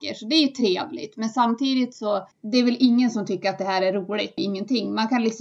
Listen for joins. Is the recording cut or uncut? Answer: cut